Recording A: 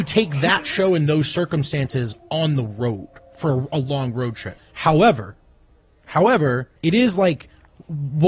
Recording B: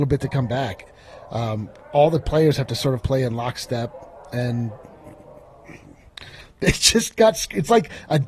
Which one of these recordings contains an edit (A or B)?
A